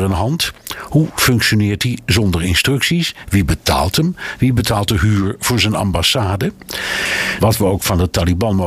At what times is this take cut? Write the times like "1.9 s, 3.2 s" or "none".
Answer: 7.4 s